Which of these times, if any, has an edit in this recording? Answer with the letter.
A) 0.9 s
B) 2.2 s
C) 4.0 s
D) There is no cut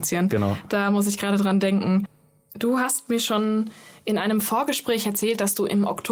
D